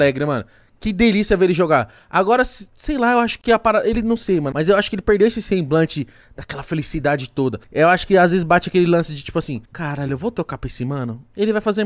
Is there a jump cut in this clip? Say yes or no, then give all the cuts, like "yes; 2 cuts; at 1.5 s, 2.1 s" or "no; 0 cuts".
yes; 3 cuts; at 4.5 s, 7.6 s, 9.7 s